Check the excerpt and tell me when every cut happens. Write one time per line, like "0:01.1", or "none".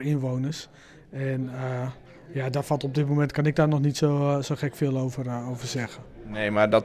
none